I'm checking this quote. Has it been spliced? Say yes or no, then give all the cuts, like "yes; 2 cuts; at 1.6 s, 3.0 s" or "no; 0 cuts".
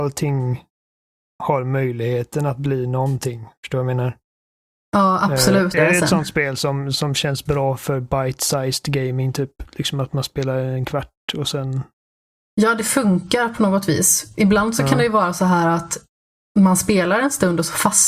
yes; 1 cut; at 5.7 s